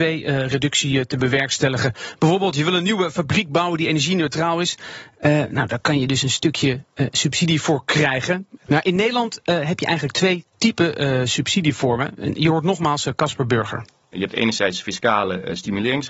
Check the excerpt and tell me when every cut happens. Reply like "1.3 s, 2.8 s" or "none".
8.7 s